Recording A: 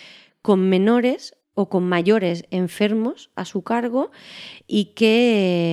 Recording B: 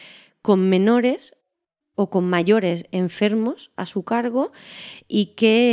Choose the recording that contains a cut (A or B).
A